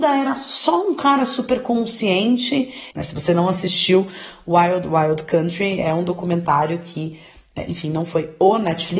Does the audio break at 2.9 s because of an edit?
yes; 1 cut; at 2.9 s

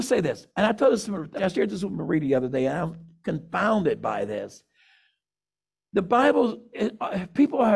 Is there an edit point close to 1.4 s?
yes; 1 cut; at 1.4 s

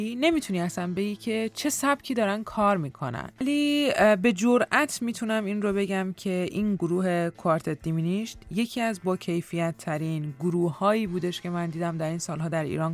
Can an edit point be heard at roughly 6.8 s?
yes; 1 cut; at 6.8 s

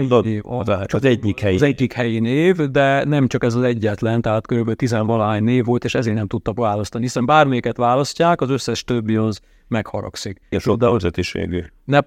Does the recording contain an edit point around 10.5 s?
yes; 1 cut; at 10.5 s

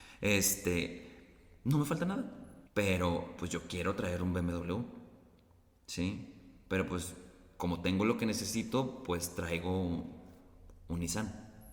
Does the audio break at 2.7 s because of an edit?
yes; 1 cut; at 2.7 s

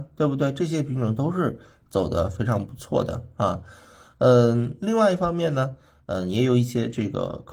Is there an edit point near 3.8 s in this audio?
no; 0 cuts

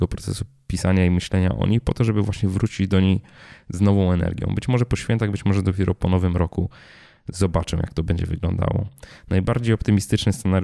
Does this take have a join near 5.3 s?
no; 0 cuts

